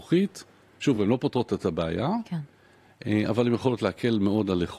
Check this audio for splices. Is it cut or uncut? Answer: uncut